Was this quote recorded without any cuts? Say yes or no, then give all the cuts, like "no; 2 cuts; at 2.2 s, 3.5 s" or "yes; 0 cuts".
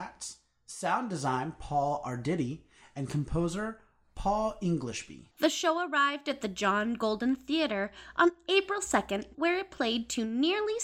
no; 2 cuts; at 5.3 s, 9.3 s